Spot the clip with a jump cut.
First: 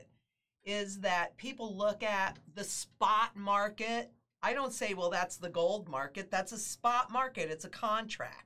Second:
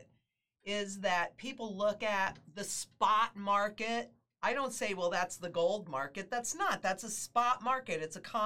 first; 1 cut; at 6.3 s

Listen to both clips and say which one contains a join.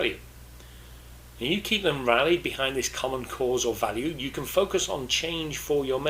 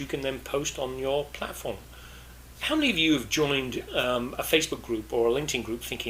second; 1 cut; at 2.5 s

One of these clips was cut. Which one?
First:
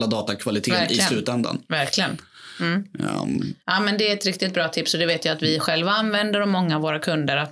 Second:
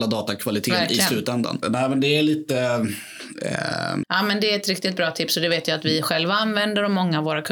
second; 2 cuts; at 1.6 s, 4.0 s

